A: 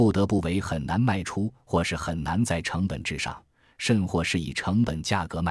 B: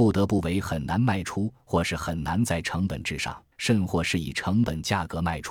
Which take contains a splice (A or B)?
B